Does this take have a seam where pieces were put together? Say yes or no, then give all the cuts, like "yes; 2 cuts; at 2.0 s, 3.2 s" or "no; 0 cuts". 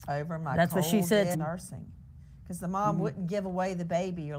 yes; 1 cut; at 1.3 s